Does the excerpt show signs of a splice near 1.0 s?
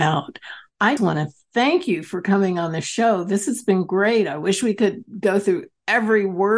yes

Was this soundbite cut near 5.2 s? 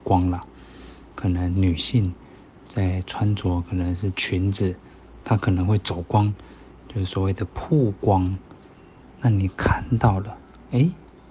yes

